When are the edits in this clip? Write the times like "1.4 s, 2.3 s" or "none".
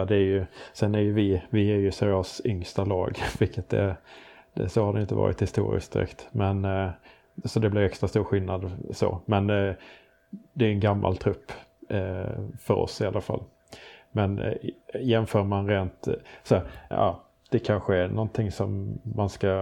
7.4 s, 14.8 s, 16.9 s